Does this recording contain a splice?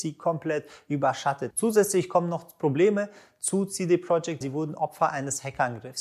yes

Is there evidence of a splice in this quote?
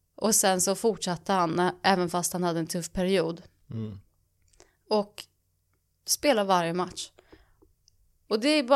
no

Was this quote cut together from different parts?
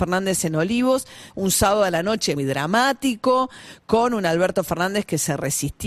yes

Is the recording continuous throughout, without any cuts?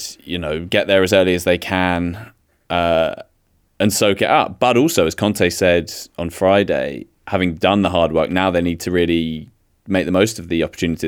yes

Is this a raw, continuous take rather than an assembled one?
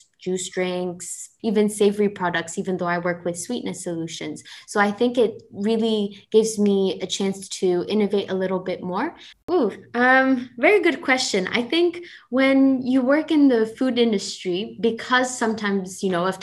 no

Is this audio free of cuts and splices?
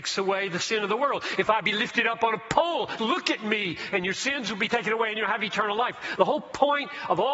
no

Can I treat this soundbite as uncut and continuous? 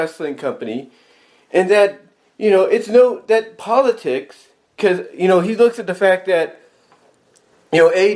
yes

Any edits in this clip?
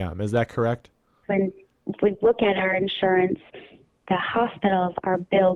yes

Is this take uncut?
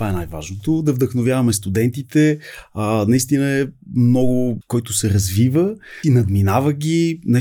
no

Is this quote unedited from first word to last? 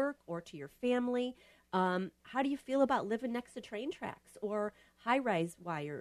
no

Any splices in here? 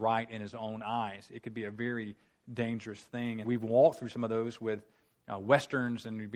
yes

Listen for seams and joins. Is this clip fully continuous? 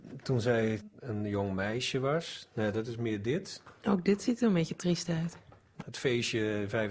no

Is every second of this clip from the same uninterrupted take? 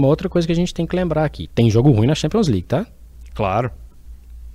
yes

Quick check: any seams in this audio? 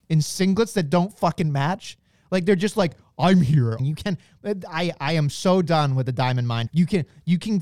yes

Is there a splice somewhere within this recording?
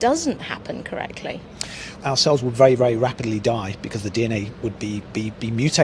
yes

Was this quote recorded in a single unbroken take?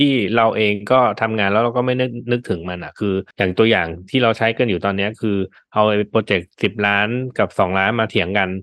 no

